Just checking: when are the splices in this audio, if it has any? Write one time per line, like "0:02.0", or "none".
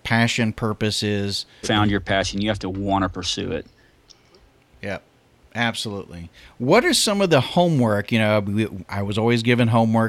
0:01.6